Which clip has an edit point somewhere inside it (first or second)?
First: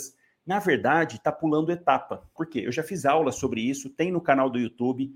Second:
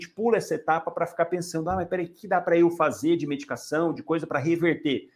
first